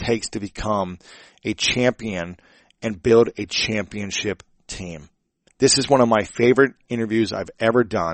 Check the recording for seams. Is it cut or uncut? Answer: cut